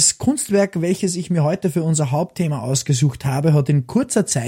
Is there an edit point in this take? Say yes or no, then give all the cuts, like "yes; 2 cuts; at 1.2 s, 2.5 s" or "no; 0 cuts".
no; 0 cuts